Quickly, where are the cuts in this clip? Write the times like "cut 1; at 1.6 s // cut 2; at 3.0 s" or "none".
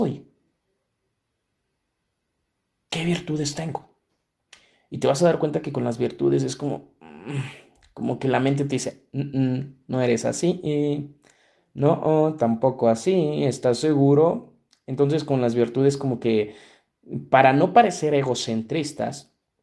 cut 1; at 2.9 s